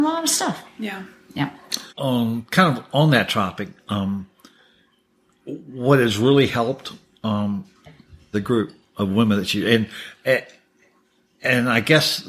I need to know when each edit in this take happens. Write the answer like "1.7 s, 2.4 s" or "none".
1.9 s, 8.3 s